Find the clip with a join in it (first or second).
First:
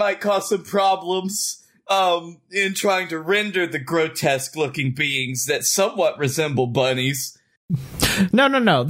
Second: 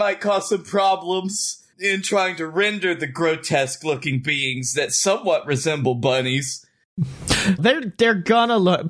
second